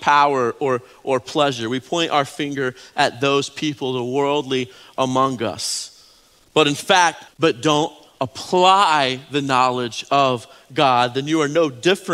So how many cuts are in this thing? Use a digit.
1